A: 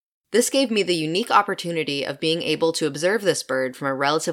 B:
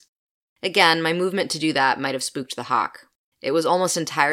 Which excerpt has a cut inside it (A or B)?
B